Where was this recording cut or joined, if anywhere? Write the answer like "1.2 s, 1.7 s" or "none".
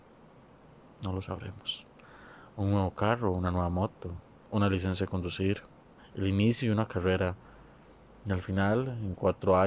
6.0 s

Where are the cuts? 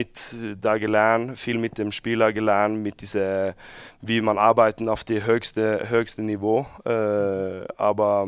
none

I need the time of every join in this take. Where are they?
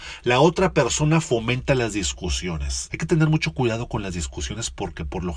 2.9 s

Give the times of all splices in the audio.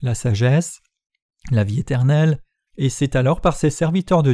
2.7 s

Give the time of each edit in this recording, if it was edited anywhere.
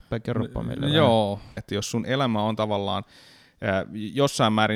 1.6 s

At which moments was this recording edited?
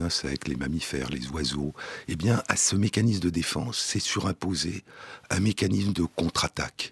2.0 s

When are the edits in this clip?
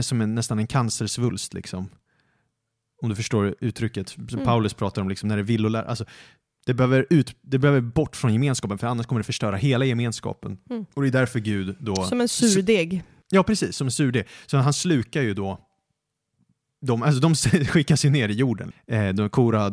18.7 s

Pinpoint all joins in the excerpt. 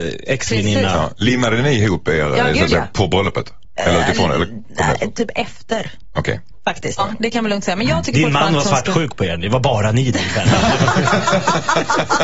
7.0 s

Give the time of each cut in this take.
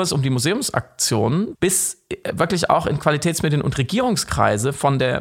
1.5 s

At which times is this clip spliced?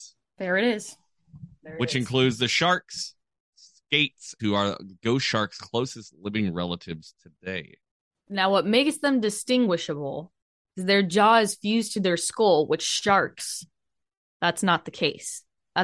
4.4 s

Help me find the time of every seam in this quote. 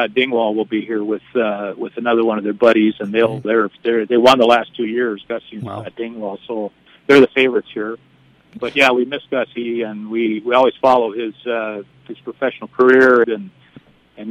3.4 s, 13.2 s

